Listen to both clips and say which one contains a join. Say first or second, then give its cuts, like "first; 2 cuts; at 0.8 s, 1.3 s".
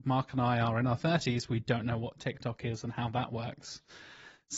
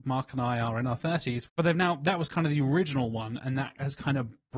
second; 1 cut; at 1.5 s